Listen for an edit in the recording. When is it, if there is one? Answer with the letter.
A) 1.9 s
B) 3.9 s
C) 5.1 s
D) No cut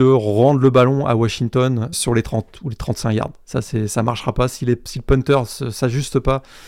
A